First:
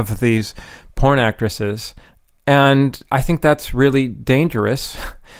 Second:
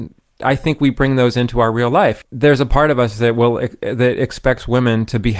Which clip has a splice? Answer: second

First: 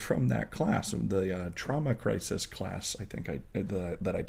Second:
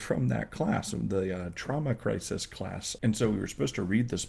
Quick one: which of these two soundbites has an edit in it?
second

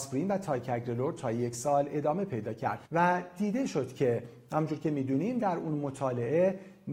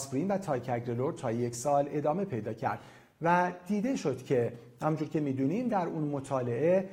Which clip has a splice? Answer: first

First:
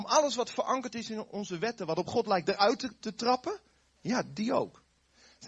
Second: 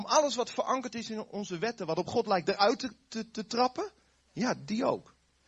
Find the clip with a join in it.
first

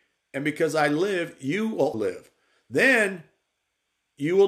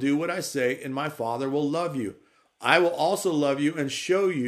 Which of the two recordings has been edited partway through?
first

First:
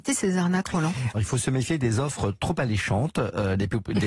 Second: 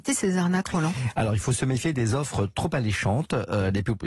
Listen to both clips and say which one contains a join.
first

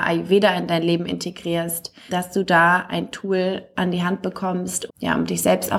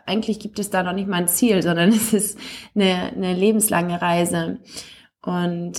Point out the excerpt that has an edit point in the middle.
first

